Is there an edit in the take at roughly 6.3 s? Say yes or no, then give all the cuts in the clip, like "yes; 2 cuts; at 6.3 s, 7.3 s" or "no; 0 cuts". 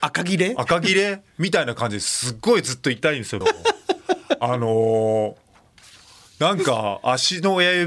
no; 1 cut; at 3.4 s